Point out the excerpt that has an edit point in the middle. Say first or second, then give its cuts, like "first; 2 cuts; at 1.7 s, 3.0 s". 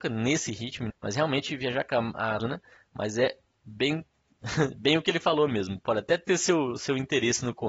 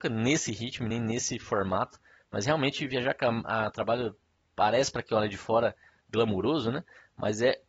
first; 2 cuts; at 0.9 s, 2.4 s